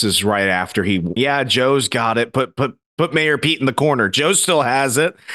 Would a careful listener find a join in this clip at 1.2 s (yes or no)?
yes